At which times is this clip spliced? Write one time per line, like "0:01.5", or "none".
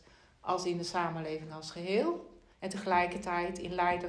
0:02.5